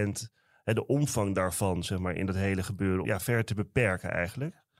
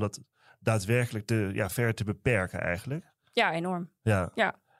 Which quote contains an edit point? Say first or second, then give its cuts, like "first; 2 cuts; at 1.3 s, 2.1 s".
first; 1 cut; at 3.0 s